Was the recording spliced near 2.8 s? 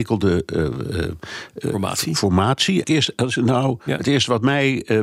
yes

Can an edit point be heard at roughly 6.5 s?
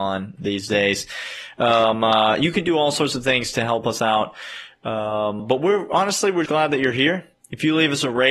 yes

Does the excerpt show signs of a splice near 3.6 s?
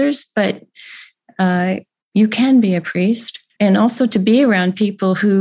yes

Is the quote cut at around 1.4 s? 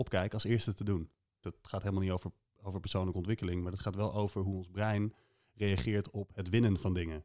yes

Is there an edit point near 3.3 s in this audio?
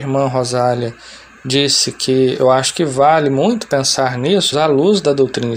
no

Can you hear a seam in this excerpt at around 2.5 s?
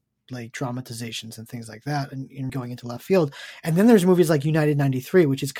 yes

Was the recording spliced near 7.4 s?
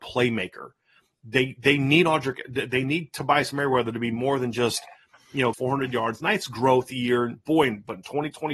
no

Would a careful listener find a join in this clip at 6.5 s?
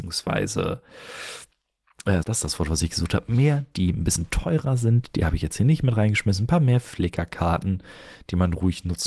no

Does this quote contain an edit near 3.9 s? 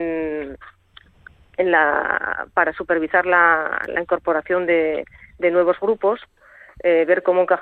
no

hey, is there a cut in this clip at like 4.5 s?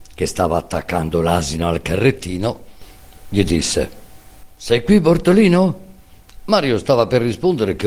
no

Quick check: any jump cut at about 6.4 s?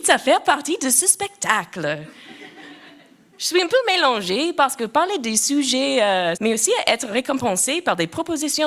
yes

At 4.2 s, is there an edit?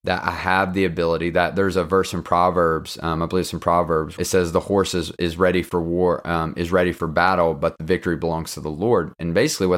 yes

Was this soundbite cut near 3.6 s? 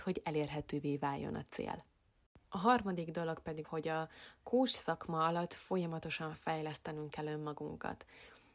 yes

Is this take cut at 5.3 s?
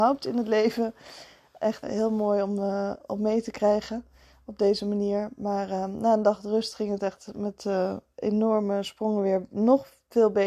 no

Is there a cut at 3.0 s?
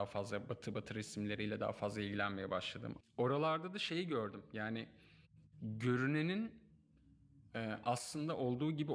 yes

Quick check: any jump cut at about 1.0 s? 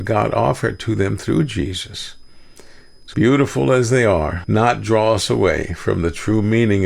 no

